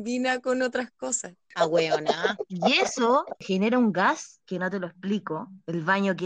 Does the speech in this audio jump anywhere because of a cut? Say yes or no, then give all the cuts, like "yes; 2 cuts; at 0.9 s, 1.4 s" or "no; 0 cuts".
yes; 1 cut; at 1.5 s